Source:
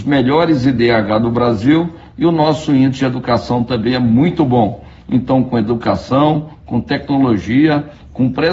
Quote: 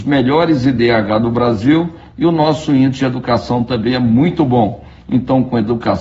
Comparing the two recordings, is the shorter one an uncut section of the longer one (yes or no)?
yes